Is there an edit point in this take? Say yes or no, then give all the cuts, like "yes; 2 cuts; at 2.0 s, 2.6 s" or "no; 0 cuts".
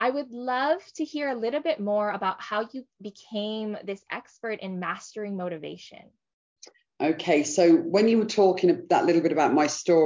no; 0 cuts